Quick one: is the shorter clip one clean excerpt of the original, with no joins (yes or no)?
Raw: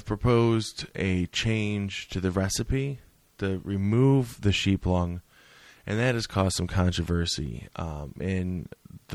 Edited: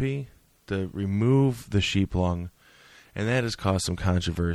yes